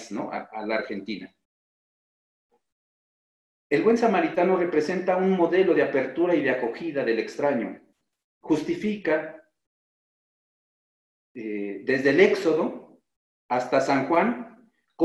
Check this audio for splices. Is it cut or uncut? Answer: uncut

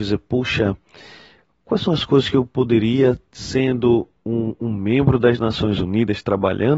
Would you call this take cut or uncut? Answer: uncut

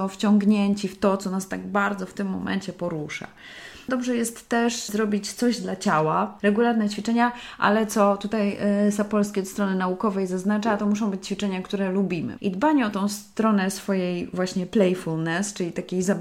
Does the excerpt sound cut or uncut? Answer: cut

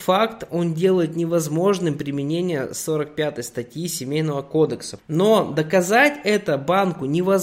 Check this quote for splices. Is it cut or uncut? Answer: cut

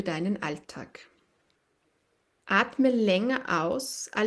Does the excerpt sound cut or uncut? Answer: cut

